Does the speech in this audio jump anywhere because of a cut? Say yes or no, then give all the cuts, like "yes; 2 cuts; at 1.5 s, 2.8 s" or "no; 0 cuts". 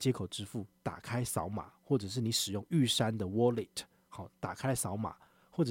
no; 0 cuts